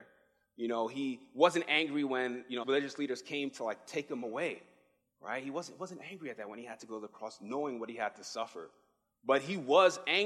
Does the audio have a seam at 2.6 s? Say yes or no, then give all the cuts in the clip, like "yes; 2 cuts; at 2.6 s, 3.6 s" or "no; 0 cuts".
yes; 1 cut; at 2.6 s